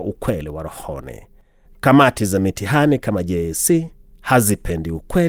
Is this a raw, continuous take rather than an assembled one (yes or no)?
no